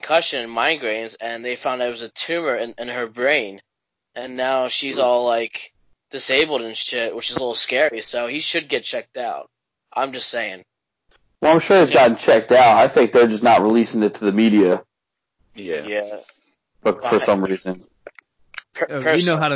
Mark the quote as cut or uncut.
uncut